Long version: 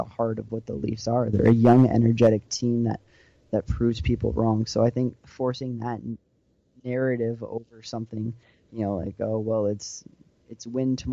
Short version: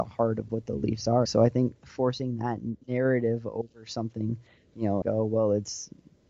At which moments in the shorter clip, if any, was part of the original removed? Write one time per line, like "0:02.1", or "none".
0:01.3
0:02.8
0:05.0